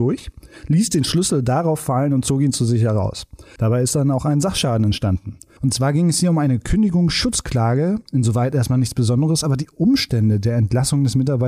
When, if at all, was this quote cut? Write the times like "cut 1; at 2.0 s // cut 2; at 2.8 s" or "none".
cut 1; at 3.6 s // cut 2; at 5.6 s